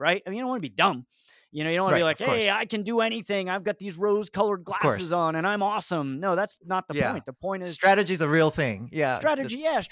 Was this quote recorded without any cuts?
yes; 0 cuts

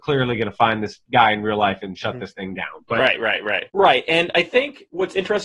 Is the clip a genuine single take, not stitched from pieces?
no; 1 cut; at 3.7 s

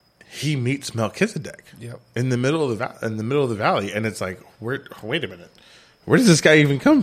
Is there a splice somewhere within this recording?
no; 0 cuts

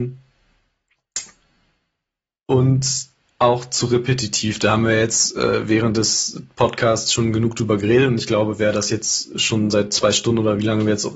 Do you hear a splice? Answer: no; 0 cuts

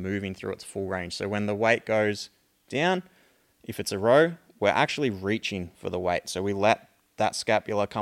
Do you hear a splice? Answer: no; 0 cuts

